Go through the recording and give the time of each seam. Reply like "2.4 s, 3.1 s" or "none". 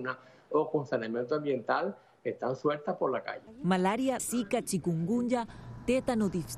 4.2 s